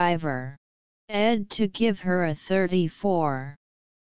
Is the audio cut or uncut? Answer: cut